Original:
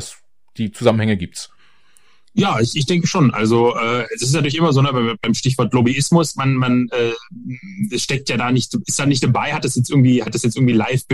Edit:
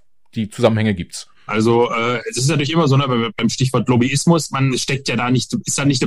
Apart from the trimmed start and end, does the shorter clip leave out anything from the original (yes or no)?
yes